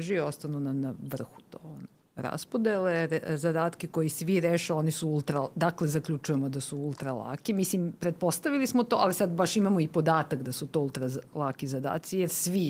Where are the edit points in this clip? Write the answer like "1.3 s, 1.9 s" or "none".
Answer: none